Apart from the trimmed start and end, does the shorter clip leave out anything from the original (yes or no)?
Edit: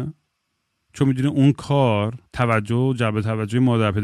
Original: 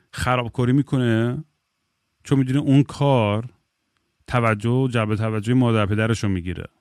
yes